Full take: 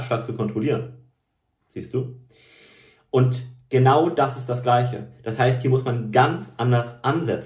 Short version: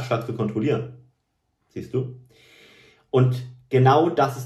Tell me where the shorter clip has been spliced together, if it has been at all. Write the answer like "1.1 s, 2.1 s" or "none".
none